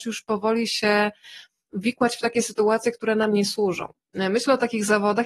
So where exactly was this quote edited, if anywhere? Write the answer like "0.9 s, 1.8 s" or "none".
1.7 s